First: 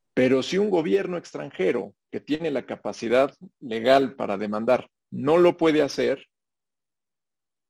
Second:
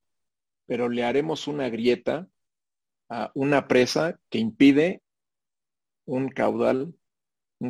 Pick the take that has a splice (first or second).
first